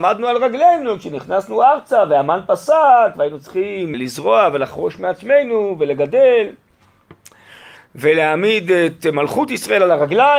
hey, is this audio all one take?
no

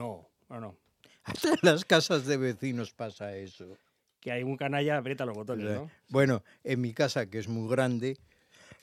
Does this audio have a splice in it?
no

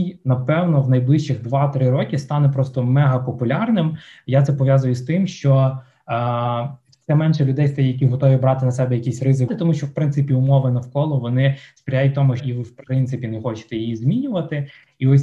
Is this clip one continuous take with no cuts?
no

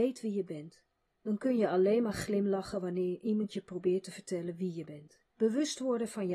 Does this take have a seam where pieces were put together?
yes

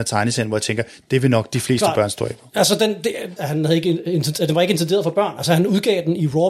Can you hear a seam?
yes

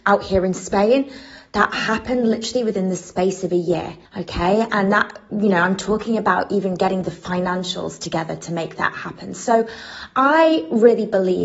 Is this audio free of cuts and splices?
no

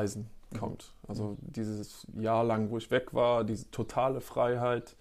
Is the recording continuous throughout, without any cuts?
yes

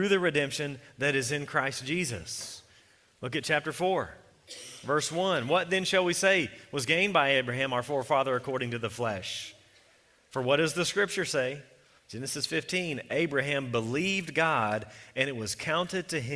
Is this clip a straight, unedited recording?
no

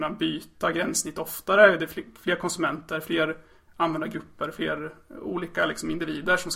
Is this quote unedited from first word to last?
yes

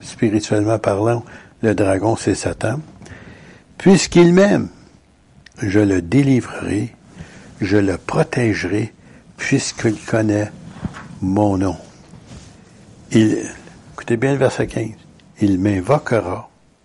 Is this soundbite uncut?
yes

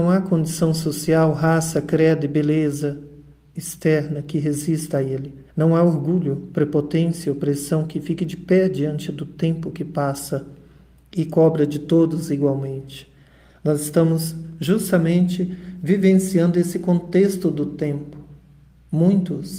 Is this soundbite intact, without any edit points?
no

